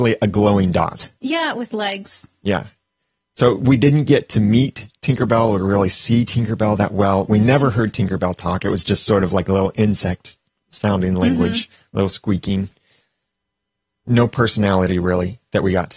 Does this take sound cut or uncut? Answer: uncut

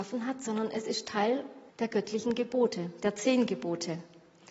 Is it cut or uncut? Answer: cut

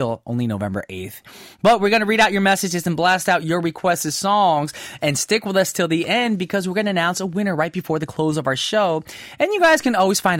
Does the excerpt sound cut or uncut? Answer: uncut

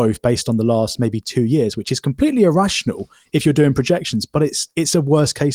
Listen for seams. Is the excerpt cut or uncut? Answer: uncut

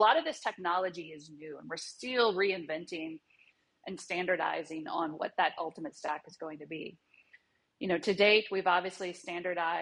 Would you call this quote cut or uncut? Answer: uncut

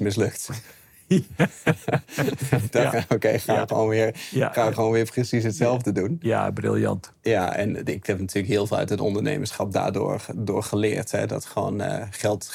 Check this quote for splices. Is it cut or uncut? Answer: cut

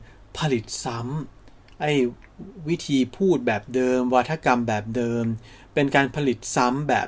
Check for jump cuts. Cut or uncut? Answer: uncut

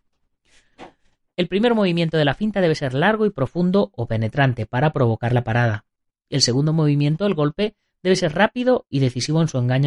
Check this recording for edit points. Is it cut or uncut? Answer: uncut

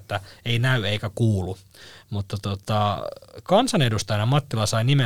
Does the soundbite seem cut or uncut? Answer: uncut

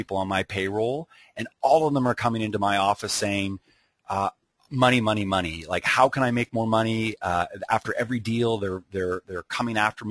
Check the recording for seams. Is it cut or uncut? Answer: uncut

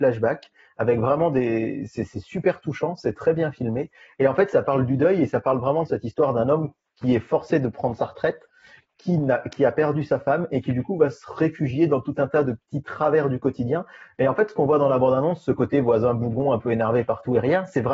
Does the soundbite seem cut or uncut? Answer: uncut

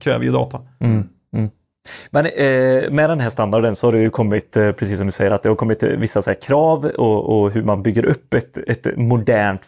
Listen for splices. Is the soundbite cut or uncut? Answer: uncut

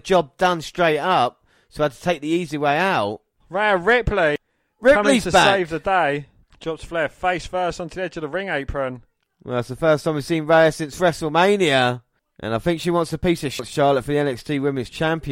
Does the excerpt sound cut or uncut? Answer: cut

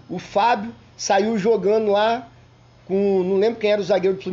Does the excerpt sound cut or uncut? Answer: uncut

